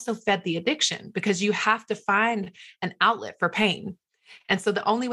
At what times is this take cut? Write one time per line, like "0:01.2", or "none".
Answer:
none